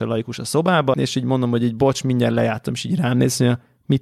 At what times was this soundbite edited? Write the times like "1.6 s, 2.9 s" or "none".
0.9 s